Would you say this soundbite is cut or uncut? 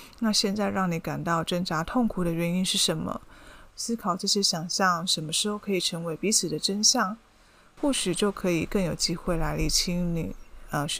cut